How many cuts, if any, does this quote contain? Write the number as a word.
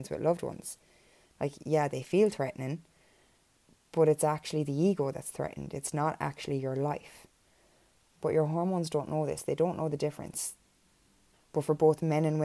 one